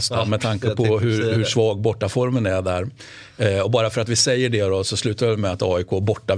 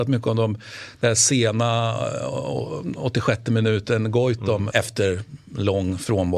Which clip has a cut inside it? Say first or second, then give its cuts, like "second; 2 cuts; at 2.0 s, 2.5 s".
second; 1 cut; at 4.7 s